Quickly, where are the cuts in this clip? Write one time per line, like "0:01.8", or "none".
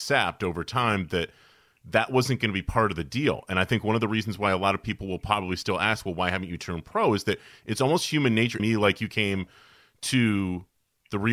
0:08.6